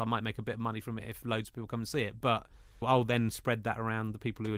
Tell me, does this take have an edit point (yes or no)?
no